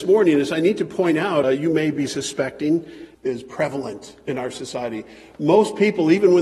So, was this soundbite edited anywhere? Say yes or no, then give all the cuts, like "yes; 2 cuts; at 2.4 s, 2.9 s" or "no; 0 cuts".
yes; 2 cuts; at 1.4 s, 3.1 s